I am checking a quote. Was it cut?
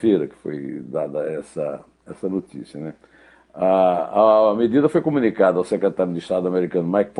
no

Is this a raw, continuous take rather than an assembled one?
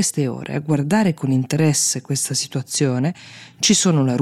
yes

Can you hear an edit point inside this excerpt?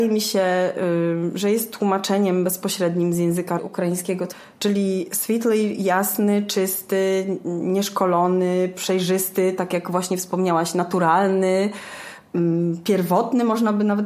no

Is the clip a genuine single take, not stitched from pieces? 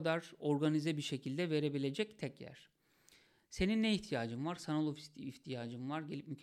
yes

